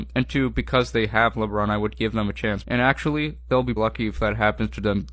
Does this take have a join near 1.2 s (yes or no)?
no